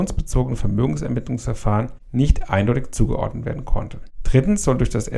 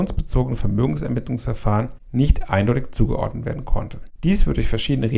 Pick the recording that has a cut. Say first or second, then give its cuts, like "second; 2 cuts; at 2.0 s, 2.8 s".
second; 1 cut; at 4.2 s